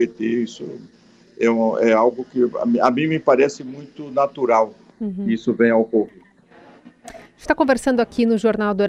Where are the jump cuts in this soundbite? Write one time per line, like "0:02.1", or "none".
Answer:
none